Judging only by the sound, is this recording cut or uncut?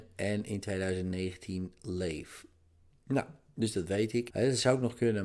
cut